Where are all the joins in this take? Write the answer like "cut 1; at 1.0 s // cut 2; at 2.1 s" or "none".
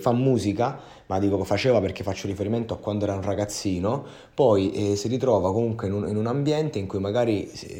none